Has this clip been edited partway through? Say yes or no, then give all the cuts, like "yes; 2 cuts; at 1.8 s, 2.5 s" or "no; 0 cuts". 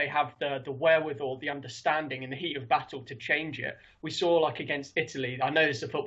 no; 0 cuts